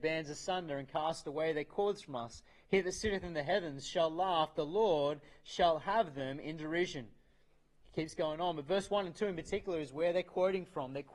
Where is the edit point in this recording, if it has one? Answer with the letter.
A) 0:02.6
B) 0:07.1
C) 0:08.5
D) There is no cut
D